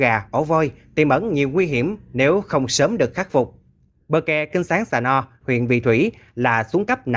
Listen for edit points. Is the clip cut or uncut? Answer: cut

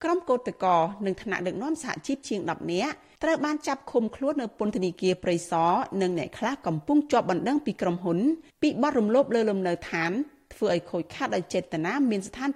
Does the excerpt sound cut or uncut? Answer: cut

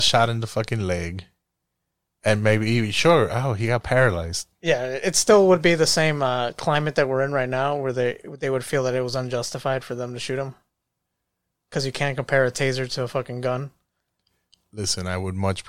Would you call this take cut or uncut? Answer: uncut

